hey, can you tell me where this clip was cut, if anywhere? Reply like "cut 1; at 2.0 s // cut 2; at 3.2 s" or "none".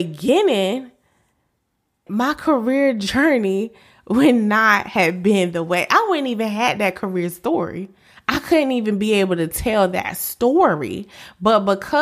cut 1; at 2.1 s // cut 2; at 8.2 s